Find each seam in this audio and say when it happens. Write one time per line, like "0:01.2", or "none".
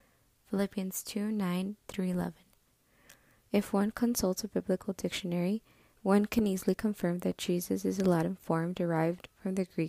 0:03.4